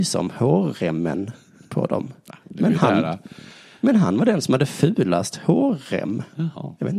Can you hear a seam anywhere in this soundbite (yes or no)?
no